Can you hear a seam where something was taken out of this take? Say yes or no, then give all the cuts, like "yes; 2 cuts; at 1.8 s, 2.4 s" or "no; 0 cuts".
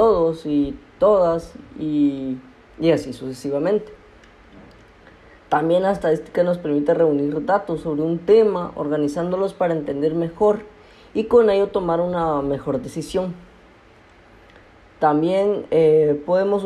no; 0 cuts